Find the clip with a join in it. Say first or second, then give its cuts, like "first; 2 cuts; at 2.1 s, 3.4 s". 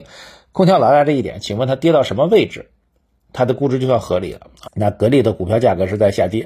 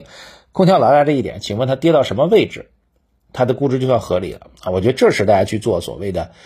first; 1 cut; at 4.6 s